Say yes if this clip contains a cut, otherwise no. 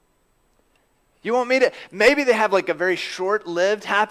no